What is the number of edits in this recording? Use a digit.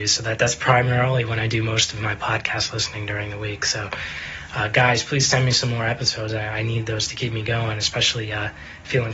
0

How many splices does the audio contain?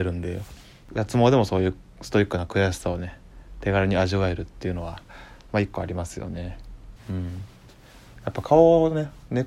1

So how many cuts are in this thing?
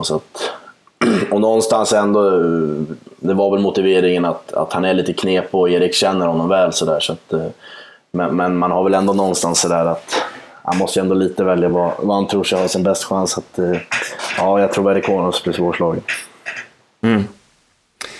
0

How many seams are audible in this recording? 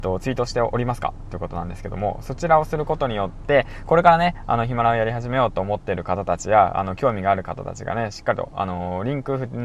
0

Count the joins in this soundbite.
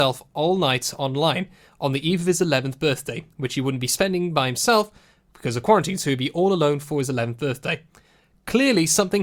0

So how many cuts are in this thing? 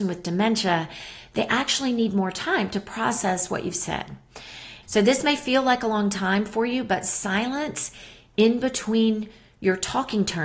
1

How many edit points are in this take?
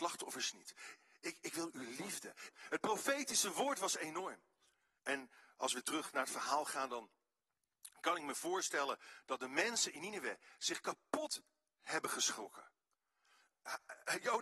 2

